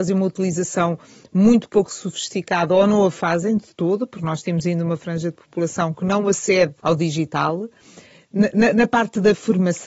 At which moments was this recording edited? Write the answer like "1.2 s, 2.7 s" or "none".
6.8 s